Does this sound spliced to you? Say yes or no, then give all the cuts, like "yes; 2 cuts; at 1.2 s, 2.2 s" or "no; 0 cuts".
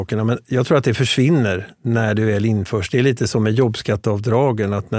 no; 0 cuts